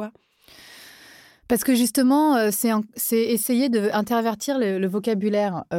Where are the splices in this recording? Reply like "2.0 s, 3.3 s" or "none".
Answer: none